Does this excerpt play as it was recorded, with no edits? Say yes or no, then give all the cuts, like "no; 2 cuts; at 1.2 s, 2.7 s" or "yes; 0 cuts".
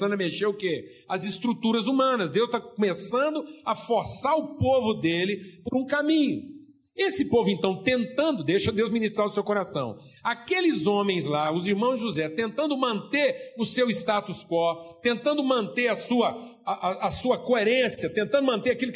yes; 0 cuts